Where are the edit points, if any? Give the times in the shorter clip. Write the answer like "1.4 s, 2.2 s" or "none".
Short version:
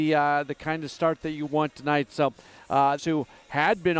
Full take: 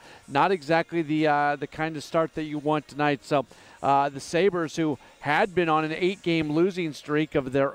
3.0 s